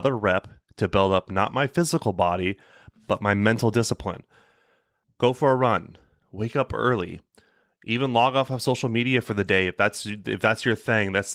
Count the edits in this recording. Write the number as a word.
one